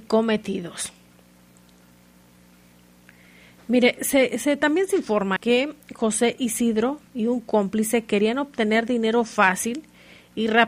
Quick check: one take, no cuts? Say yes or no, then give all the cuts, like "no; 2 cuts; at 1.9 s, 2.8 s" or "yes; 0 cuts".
no; 2 cuts; at 5.4 s, 7.1 s